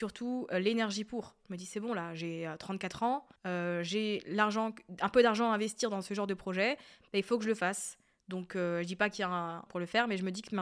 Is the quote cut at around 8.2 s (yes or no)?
no